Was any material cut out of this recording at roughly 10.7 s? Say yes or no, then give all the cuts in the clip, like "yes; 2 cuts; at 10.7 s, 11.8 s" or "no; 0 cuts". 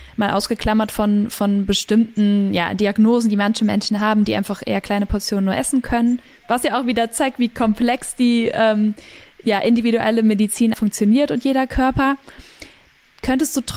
yes; 1 cut; at 10.7 s